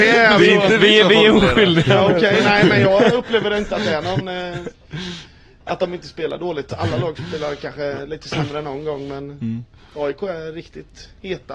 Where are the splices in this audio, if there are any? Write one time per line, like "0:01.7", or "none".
none